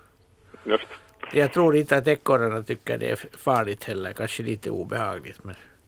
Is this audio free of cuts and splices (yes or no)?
no